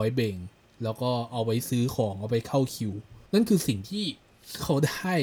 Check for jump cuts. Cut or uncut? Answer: cut